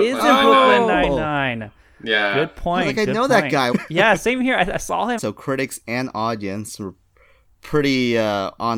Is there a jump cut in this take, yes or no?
yes